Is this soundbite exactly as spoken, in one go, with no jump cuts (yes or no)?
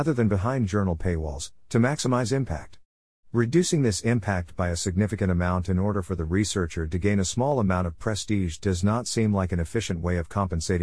yes